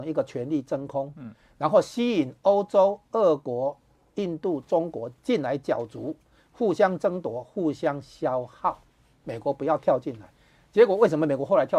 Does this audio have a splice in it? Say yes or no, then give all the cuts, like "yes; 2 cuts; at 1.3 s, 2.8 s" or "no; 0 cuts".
no; 0 cuts